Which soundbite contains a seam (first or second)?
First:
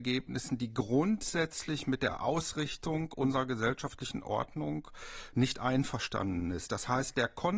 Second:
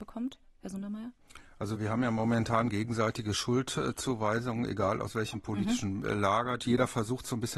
second